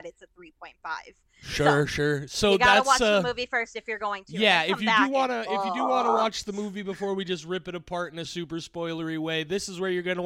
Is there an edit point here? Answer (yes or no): yes